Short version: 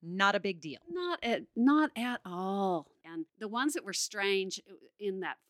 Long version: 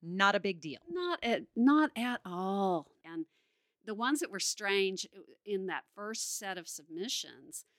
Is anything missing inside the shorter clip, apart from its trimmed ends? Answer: yes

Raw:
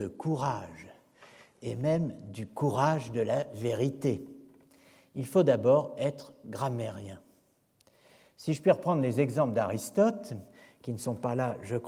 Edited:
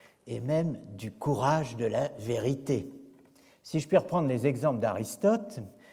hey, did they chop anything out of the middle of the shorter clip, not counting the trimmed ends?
yes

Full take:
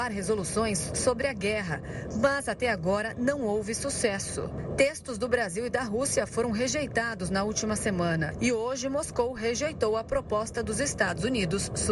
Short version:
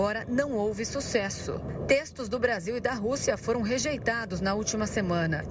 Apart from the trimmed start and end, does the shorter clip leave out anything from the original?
no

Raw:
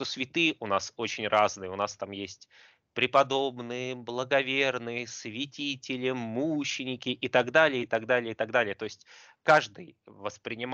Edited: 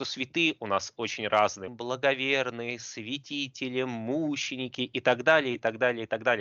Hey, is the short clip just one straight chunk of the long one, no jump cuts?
no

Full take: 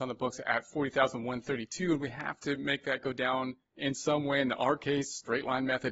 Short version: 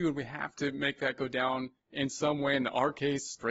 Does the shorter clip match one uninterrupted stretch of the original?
yes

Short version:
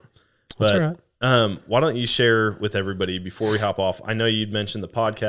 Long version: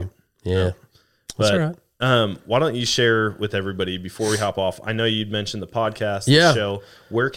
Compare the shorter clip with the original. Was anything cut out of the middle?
no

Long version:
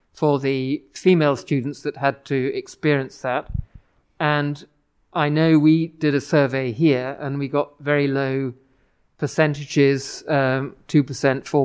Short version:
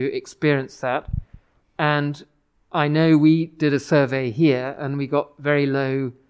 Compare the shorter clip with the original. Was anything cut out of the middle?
no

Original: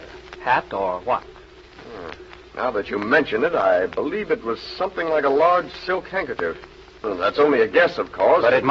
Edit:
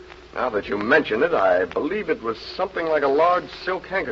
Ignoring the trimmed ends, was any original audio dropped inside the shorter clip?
no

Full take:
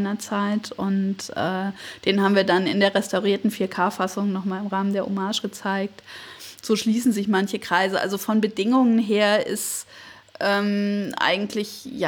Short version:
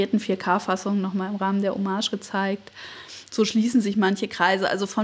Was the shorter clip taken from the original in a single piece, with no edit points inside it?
yes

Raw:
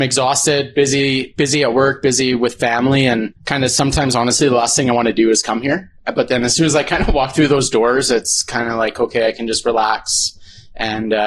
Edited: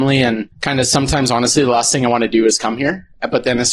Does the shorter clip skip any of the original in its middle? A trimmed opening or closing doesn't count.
no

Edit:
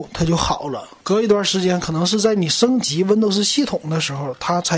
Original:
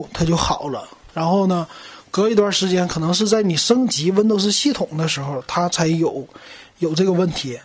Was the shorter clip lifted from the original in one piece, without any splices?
no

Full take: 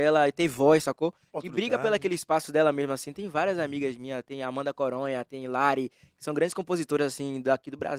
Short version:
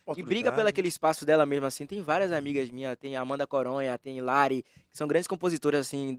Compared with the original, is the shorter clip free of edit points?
yes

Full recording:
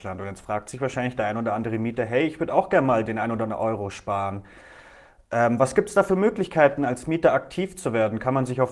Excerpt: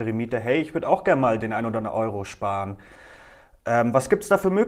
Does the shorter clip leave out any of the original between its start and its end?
no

